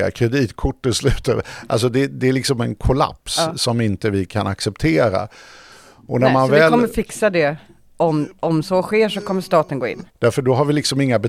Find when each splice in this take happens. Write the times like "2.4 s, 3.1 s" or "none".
10.1 s